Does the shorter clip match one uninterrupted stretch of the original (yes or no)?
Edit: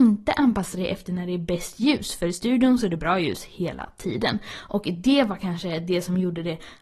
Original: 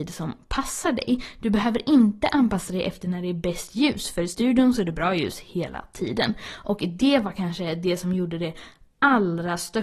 yes